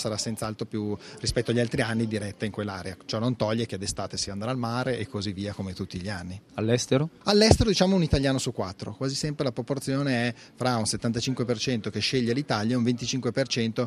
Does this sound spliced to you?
no; 0 cuts

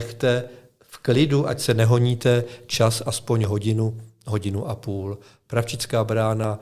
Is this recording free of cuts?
yes; 0 cuts

